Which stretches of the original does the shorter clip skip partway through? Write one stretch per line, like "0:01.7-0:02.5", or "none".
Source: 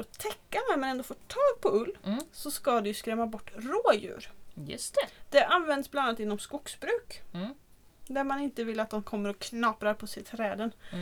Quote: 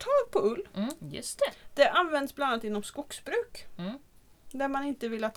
0:02.3-0:04.5